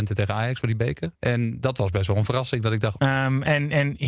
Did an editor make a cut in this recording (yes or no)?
yes